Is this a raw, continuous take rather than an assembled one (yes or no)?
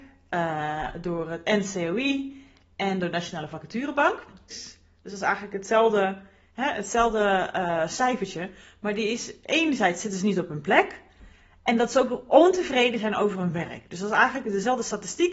no